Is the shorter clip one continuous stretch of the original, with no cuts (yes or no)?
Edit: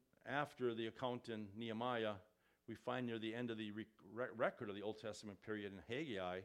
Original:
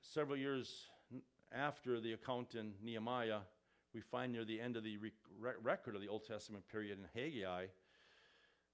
yes